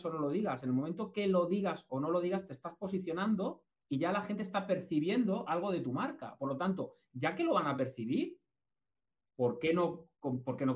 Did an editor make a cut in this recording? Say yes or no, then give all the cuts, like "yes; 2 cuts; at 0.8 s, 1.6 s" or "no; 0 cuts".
no; 0 cuts